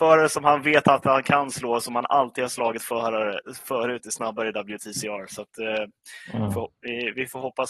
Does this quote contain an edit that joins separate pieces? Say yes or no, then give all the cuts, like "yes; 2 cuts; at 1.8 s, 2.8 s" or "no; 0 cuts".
no; 0 cuts